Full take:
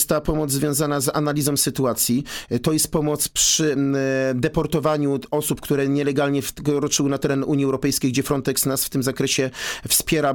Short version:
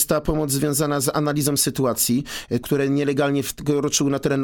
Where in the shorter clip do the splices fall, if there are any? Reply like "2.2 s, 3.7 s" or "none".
2.6 s